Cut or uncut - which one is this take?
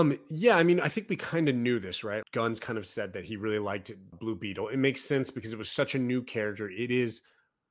cut